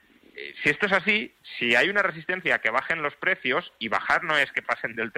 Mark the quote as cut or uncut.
uncut